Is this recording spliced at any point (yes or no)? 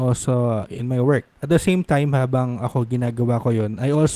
no